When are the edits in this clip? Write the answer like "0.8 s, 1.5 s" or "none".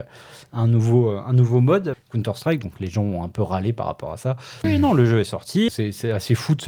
1.9 s, 4.6 s, 5.7 s

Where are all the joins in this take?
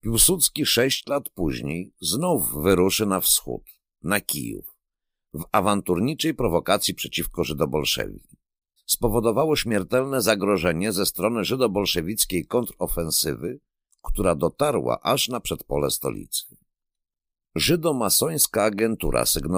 8.8 s

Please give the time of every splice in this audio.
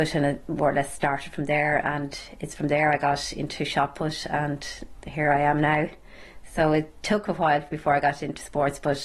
none

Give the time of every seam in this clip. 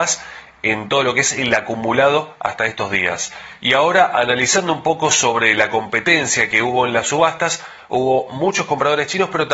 3.6 s

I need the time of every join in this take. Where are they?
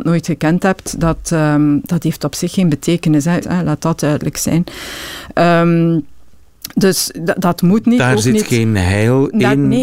3.4 s

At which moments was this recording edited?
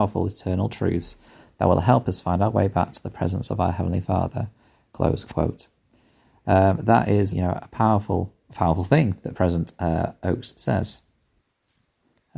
7.3 s

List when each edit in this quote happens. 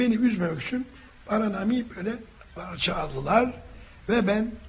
2.6 s

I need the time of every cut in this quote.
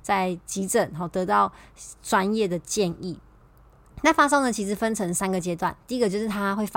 none

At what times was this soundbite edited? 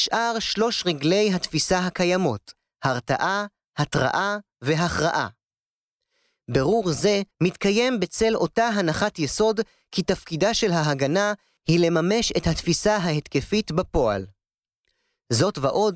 7.3 s

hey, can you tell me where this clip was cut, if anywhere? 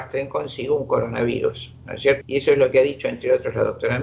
2.2 s

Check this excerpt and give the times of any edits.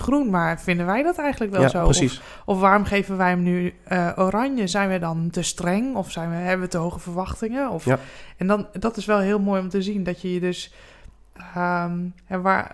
none

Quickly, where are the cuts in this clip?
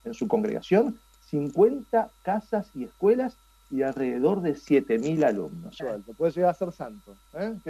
5.8 s

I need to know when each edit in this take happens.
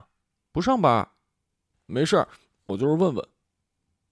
1.7 s

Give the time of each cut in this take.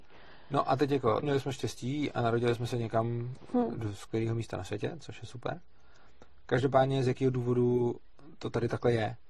1.2 s

